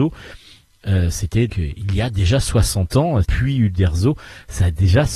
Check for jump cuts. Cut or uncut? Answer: cut